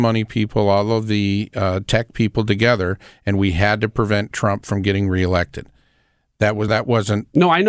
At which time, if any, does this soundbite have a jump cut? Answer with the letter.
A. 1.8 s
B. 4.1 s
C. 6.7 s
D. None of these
C